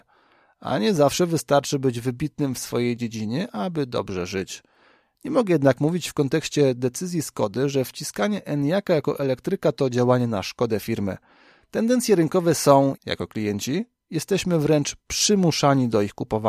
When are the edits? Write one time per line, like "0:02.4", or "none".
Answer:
0:13.0